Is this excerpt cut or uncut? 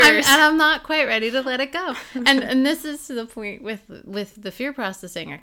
uncut